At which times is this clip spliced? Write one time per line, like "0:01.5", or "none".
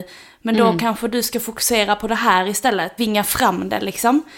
0:03.0